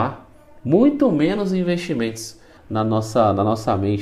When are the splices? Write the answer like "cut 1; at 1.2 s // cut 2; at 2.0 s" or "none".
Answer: cut 1; at 2.6 s

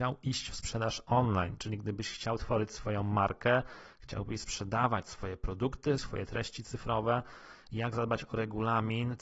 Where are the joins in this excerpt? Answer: cut 1; at 6.0 s

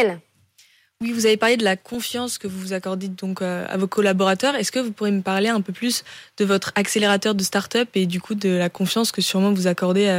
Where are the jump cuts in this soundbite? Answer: none

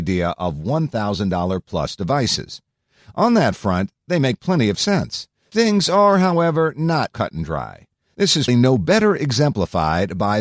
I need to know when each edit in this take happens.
cut 1; at 7.1 s // cut 2; at 8.5 s

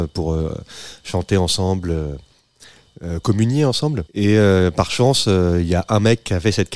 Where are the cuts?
cut 1; at 4.1 s

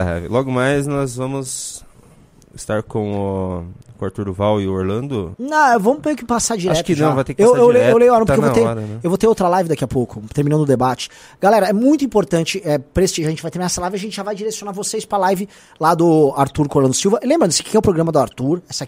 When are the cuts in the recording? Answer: cut 1; at 5.3 s

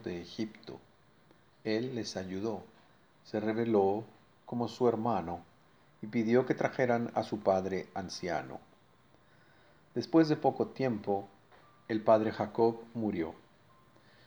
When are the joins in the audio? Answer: none

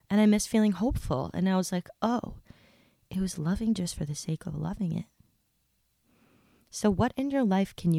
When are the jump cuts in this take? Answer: cut 1; at 1.3 s

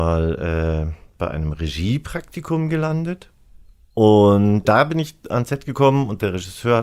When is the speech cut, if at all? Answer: cut 1; at 4.6 s

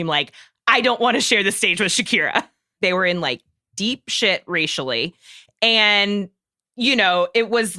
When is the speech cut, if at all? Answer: cut 1; at 2.8 s

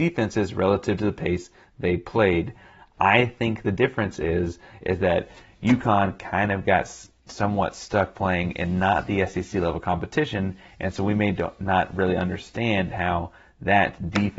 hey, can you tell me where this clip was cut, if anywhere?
none

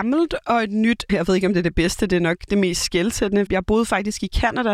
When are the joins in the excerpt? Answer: cut 1; at 1.1 s // cut 2; at 3.5 s

